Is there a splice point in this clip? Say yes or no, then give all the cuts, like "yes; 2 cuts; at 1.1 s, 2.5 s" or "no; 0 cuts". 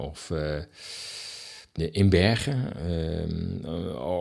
yes; 1 cut; at 1.8 s